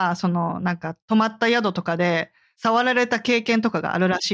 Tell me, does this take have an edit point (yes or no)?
no